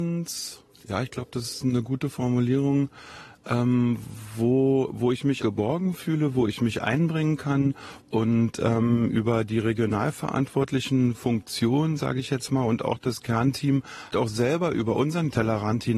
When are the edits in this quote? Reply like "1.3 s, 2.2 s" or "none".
5.4 s, 8.0 s, 14.1 s